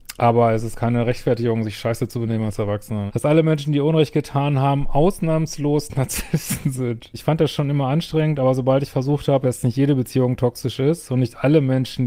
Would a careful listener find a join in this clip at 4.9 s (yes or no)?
no